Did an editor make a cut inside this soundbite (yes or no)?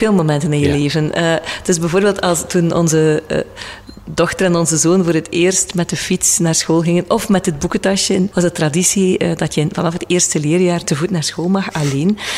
yes